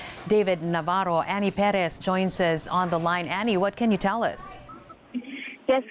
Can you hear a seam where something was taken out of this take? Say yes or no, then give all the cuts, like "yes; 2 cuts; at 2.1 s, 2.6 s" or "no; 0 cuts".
yes; 1 cut; at 2.0 s